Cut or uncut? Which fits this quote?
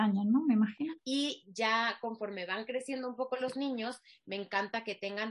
cut